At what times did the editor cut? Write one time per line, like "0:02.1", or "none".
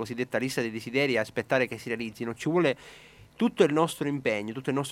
none